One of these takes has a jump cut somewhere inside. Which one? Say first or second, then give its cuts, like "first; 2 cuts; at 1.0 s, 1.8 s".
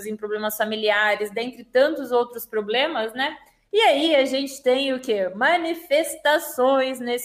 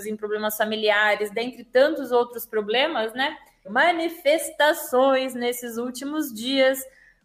second; 1 cut; at 3.6 s